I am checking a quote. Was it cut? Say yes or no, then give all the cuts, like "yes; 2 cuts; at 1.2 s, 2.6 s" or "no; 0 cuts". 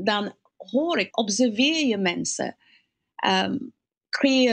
yes; 1 cut; at 1.1 s